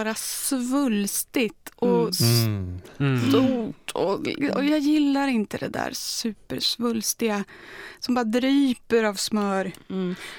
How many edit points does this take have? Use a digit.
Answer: 0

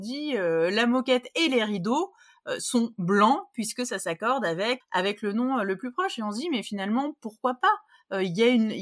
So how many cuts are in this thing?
1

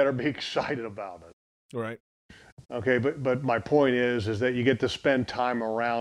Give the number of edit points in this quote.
1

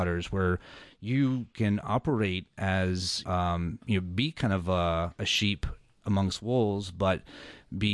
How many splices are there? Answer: 1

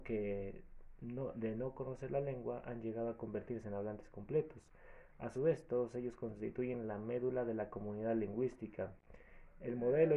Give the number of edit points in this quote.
0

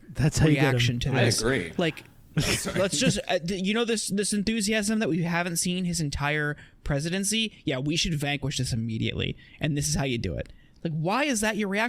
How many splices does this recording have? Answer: 0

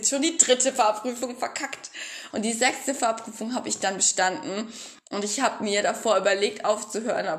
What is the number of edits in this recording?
1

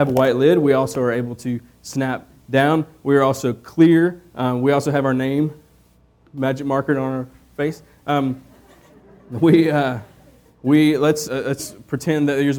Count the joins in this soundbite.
1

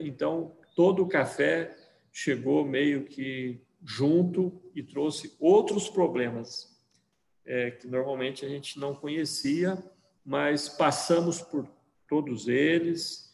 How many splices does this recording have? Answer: 0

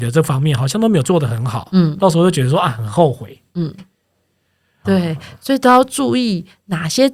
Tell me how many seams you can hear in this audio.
1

